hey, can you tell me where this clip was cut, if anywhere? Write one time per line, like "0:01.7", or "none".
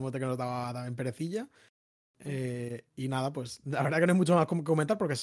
none